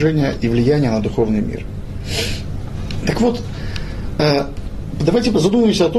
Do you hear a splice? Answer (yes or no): no